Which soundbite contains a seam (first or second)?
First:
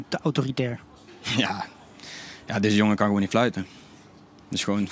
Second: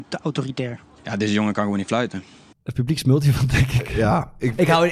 second